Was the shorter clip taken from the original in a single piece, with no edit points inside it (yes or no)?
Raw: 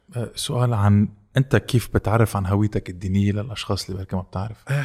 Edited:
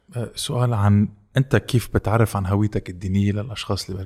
yes